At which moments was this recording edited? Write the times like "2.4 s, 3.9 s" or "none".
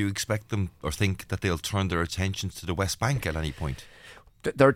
none